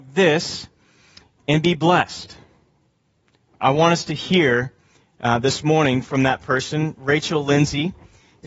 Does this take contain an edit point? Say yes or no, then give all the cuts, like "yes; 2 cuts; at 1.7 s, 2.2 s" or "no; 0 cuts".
yes; 1 cut; at 3.5 s